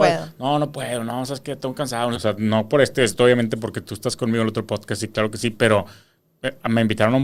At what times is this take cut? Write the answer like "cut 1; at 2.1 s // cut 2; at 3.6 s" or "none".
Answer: cut 1; at 2.1 s